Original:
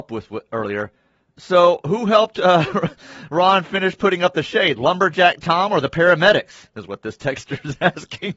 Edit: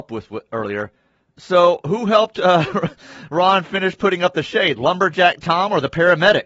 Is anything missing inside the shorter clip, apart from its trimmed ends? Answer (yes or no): no